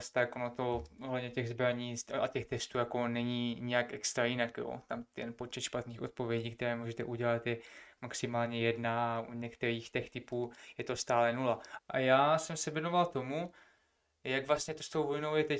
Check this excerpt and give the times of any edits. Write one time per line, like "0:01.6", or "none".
0:11.8

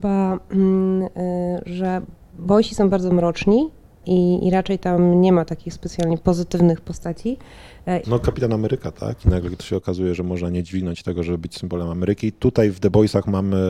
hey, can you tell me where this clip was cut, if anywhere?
0:08.0

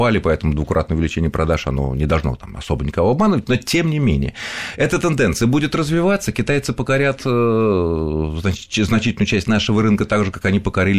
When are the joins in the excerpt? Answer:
none

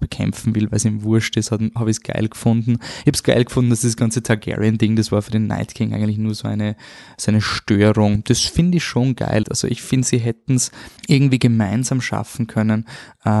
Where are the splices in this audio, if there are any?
0:09.4
0:11.0

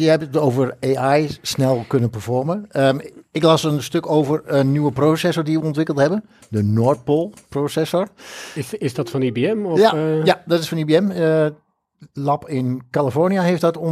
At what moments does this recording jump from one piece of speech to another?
none

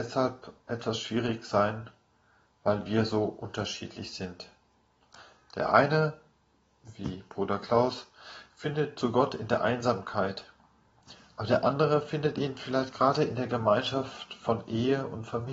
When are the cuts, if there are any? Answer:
none

